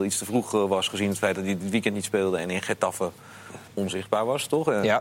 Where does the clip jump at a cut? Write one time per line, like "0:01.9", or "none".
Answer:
0:03.7

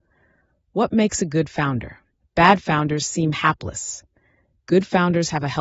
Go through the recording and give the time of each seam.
0:02.2
0:04.5

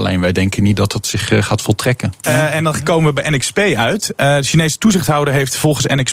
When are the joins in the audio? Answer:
0:02.2

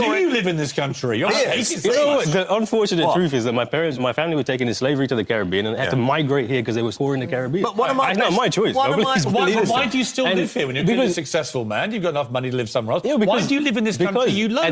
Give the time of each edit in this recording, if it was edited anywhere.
0:04.0
0:06.9

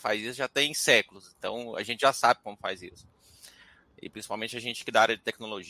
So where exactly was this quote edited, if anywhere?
none

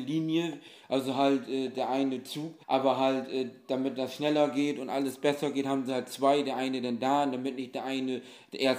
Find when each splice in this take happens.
0:02.6

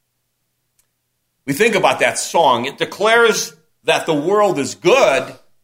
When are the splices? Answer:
none

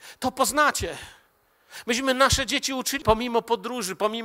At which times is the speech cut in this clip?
0:03.0

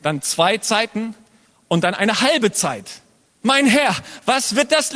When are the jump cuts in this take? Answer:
0:03.3

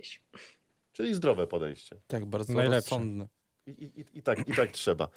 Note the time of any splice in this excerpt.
none

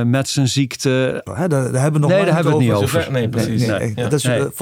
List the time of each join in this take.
0:01.3

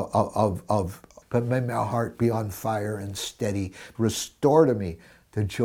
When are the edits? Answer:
0:01.2
0:03.9

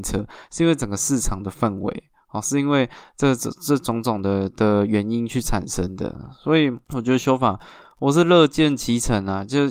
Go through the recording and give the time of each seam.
0:06.8

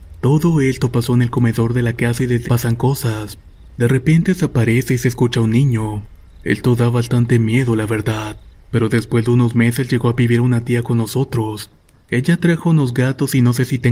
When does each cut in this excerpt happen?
0:02.4

